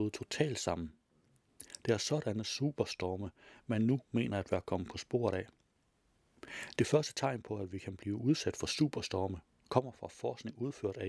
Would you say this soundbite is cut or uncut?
uncut